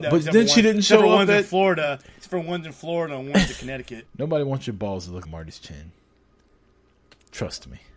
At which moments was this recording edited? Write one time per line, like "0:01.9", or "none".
0:04.1
0:05.2